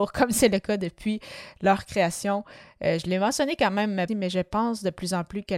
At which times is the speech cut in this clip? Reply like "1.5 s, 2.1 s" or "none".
4.1 s